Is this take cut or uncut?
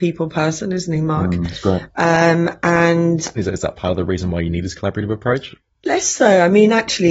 cut